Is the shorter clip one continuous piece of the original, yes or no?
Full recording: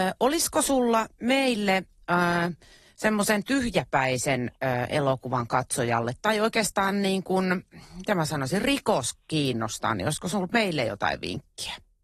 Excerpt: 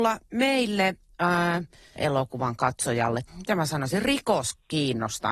no